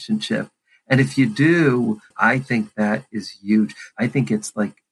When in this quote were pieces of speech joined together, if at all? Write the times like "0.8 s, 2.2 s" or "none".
2.1 s, 3.9 s